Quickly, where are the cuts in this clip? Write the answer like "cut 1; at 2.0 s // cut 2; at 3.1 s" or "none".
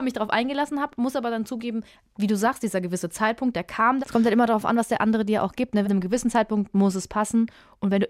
cut 1; at 4.0 s // cut 2; at 5.8 s